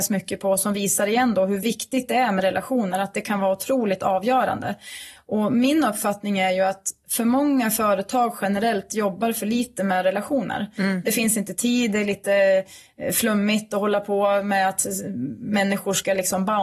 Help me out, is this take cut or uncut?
uncut